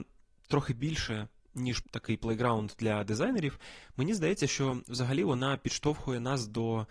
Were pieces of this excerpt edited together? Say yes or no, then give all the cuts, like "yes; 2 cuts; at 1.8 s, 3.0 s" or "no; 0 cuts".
yes; 1 cut; at 1.8 s